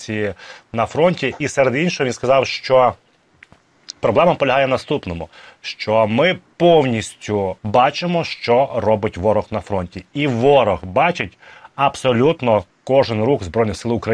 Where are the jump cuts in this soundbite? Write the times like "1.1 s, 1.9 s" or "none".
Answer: 7.6 s